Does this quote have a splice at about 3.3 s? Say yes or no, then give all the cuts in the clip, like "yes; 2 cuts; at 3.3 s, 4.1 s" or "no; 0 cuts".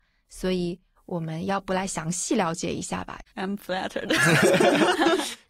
yes; 1 cut; at 3.3 s